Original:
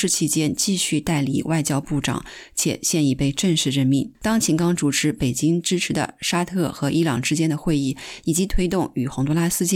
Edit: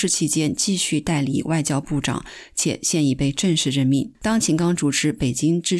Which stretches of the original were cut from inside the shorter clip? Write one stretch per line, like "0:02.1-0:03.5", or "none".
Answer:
none

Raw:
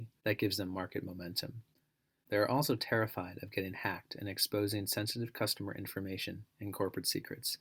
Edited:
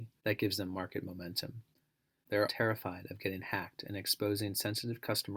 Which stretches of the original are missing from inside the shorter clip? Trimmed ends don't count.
0:02.5-0:02.8

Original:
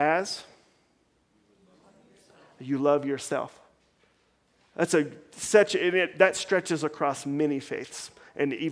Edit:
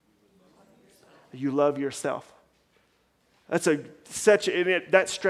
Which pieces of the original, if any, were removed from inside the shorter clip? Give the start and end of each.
none

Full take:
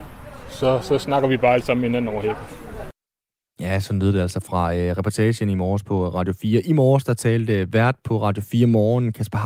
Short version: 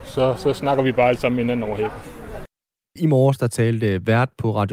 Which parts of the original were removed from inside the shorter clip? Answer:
0:03.4-0:06.6

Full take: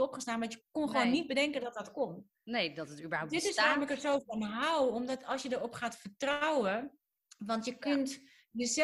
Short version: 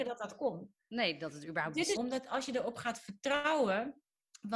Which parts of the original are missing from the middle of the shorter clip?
0:03.5-0:04.9

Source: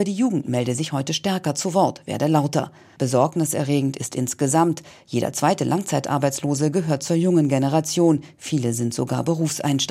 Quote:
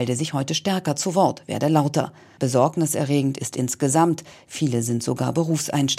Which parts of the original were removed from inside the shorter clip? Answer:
0:05.0-0:08.4

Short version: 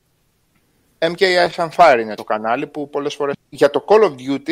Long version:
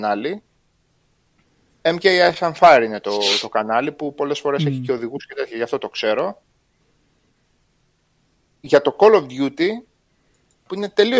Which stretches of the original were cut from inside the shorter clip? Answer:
0:03.0-0:03.4
0:04.6-0:08.4

